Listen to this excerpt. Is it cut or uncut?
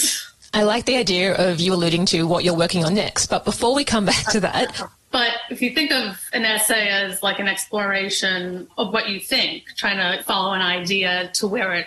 cut